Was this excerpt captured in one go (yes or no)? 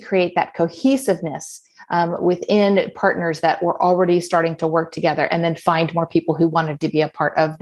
yes